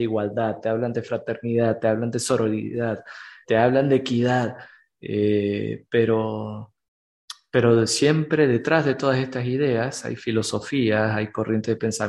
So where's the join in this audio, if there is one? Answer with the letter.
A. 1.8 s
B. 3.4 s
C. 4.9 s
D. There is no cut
B